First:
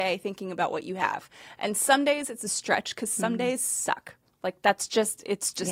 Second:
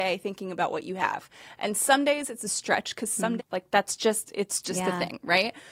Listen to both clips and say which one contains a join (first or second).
second